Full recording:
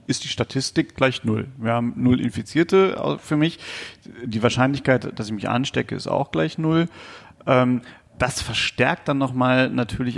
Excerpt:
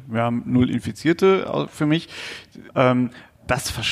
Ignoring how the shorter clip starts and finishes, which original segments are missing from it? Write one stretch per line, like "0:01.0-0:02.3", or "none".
0:04.2-0:07.4